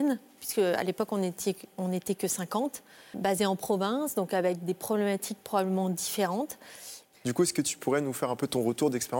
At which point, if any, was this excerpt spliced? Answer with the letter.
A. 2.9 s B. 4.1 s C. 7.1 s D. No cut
C